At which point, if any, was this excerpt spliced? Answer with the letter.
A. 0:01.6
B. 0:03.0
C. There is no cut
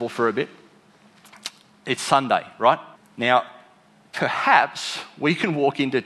B